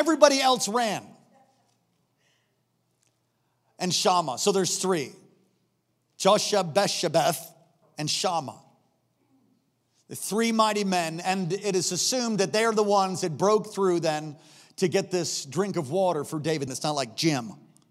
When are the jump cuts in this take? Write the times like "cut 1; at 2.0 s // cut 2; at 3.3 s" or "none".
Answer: cut 1; at 7.8 s // cut 2; at 16.7 s